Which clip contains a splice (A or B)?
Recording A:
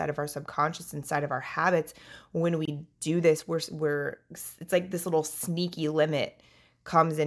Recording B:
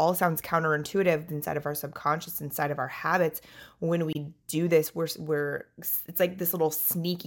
B